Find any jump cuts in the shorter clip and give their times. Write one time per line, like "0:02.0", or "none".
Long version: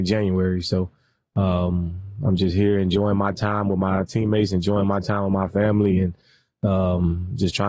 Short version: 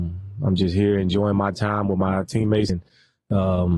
0:02.7